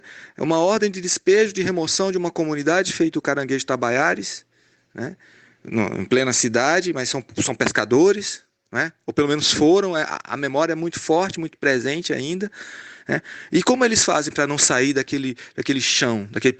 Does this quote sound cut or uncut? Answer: uncut